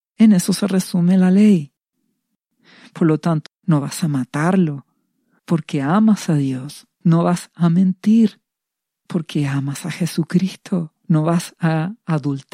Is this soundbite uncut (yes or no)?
no